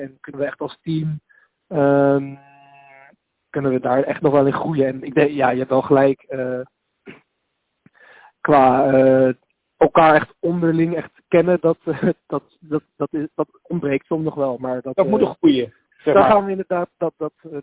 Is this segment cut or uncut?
uncut